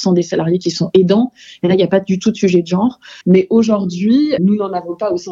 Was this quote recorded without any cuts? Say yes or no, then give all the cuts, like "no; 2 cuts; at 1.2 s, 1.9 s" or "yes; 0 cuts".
no; 2 cuts; at 3.2 s, 4.4 s